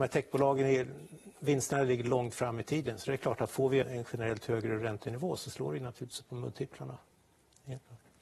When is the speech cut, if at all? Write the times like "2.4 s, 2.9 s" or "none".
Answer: 3.8 s